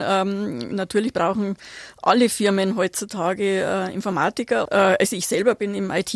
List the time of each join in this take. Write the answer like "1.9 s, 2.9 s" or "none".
4.6 s